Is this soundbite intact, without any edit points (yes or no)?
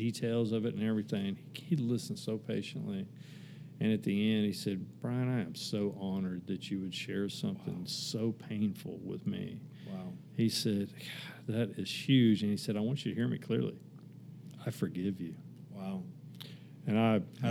yes